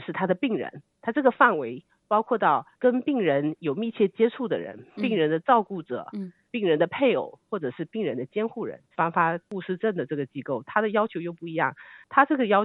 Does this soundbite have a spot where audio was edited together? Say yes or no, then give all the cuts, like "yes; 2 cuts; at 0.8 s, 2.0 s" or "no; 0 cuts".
yes; 1 cut; at 8.9 s